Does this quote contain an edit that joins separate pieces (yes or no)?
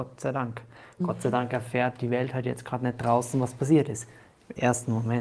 no